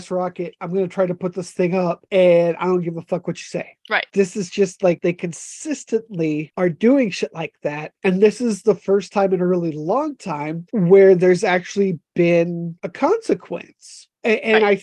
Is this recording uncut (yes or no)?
no